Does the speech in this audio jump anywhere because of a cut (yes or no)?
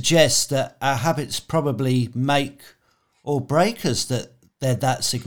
no